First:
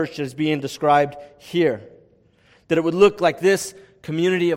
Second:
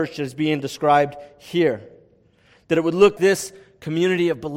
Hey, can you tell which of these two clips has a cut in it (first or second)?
second